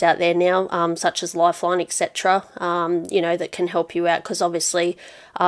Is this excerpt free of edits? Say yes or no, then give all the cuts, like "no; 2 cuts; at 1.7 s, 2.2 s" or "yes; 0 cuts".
yes; 0 cuts